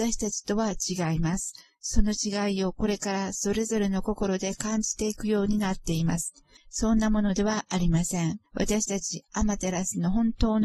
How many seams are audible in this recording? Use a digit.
2